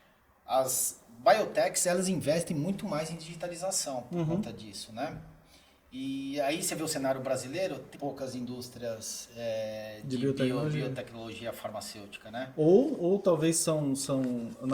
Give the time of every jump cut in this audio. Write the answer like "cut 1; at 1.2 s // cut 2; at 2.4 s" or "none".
cut 1; at 7.9 s

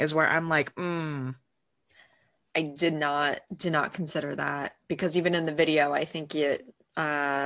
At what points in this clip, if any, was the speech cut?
cut 1; at 2.5 s

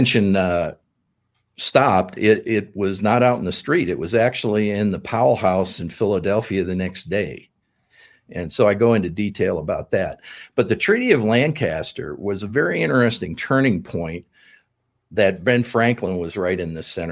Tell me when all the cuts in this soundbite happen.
none

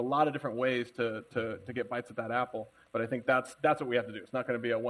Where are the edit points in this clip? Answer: none

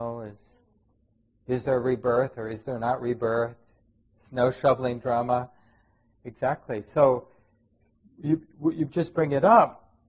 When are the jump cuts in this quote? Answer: cut 1; at 4.1 s

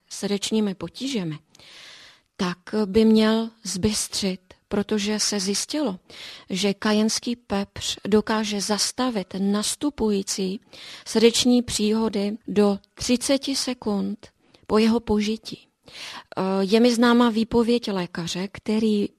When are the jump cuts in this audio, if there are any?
cut 1; at 12.4 s

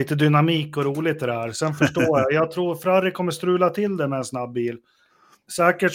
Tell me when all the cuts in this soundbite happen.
none

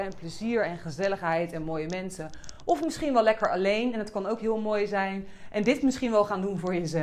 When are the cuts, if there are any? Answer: none

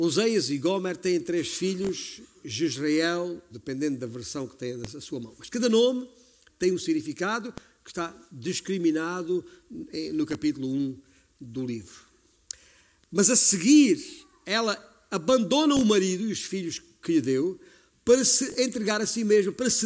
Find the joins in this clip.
cut 1; at 3.5 s

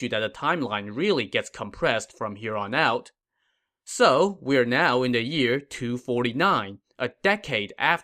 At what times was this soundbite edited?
none

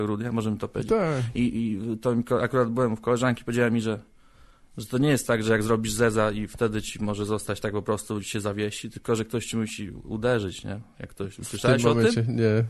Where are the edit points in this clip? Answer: none

